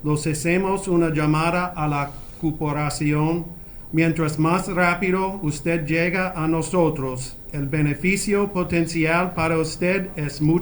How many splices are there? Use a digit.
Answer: 0